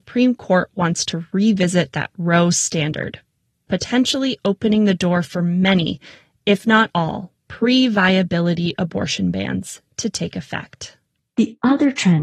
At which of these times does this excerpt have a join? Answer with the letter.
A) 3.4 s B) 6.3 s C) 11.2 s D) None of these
D